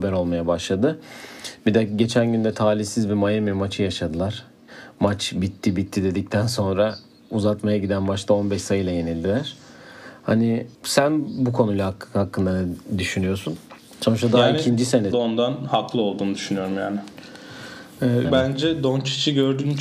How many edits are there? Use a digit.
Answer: 3